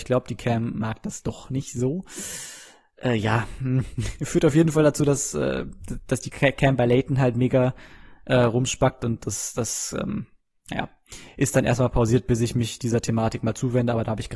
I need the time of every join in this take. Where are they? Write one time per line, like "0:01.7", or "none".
none